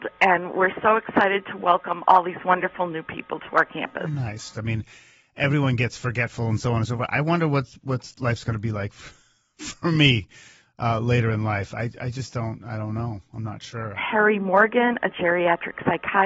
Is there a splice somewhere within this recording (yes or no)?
yes